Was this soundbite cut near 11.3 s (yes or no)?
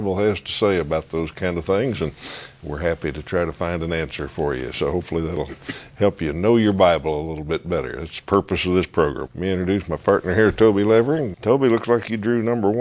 yes